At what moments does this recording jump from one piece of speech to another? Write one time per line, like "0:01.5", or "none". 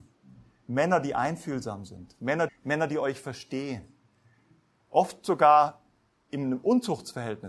0:02.5